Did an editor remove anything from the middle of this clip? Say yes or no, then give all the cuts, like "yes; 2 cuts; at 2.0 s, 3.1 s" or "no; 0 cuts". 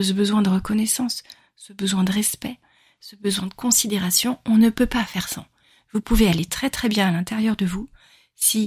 no; 0 cuts